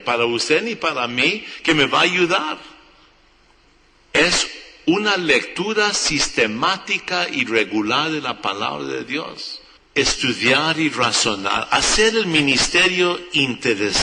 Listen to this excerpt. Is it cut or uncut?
cut